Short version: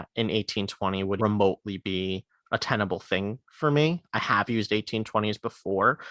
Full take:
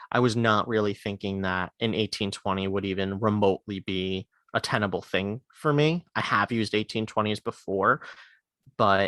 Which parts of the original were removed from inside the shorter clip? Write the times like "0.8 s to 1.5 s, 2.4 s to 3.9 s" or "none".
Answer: 2.8 s to 3.2 s